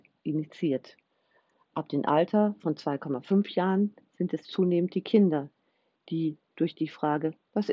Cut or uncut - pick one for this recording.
uncut